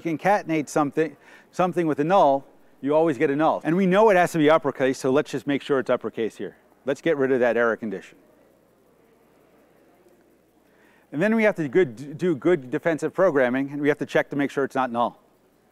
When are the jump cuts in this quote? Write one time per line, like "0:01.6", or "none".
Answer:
0:03.6